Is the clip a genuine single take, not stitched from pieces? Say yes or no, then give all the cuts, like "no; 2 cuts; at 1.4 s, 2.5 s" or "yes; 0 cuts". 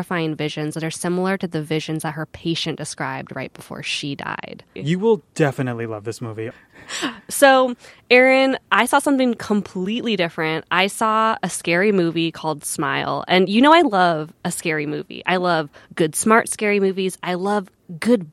no; 1 cut; at 4.8 s